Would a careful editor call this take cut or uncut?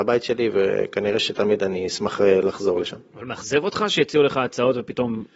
uncut